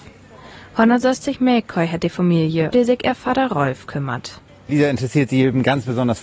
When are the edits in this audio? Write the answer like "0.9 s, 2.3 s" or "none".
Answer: 2.7 s